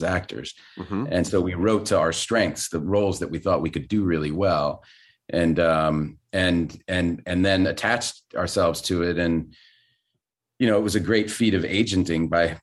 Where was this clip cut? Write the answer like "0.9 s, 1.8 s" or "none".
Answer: none